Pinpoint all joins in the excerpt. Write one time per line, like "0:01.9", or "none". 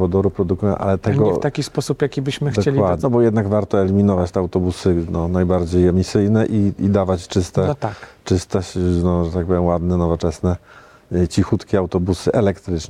0:03.0

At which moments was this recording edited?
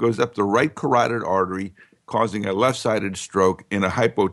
none

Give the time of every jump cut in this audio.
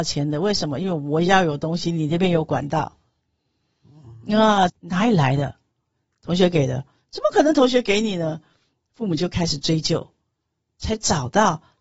0:04.7

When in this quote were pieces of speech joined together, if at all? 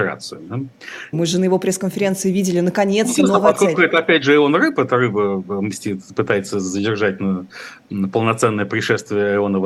0:01.1

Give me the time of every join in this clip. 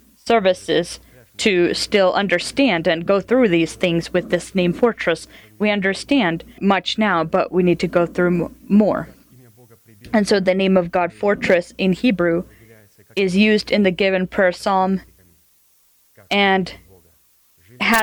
0:06.6

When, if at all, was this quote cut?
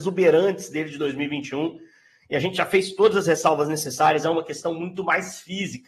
none

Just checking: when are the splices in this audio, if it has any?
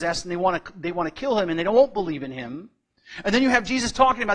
none

